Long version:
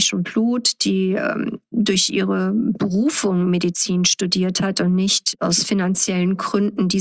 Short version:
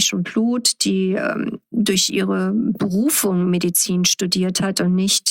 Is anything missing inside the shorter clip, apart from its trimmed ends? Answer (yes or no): no